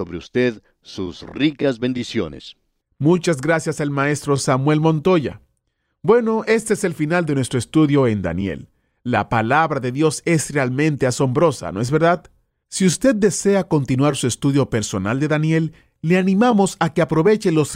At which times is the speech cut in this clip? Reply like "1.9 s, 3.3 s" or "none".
none